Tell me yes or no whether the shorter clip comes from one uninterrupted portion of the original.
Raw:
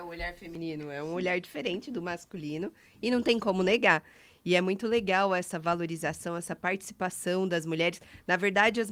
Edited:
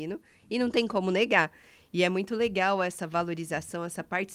yes